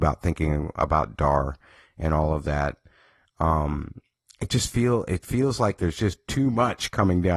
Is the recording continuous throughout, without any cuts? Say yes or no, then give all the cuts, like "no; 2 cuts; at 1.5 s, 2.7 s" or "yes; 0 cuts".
yes; 0 cuts